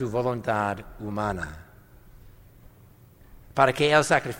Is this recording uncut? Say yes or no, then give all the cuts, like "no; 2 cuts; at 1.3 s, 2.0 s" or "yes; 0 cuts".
no; 1 cut; at 3.4 s